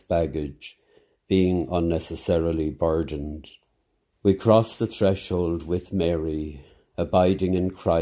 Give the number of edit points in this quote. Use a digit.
1